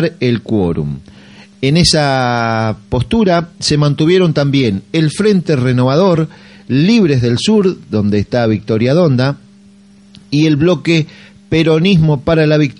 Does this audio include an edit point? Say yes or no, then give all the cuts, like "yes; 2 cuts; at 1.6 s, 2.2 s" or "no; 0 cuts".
no; 0 cuts